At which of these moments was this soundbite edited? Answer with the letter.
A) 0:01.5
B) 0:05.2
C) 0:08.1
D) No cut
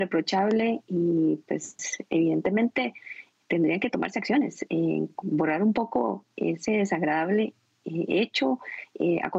B